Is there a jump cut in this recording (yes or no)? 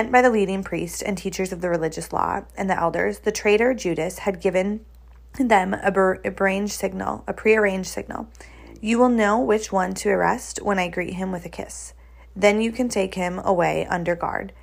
no